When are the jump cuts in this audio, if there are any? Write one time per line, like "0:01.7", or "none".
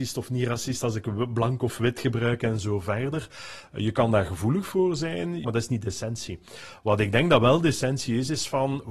0:05.4